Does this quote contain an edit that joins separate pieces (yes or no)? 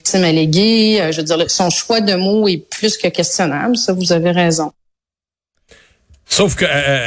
no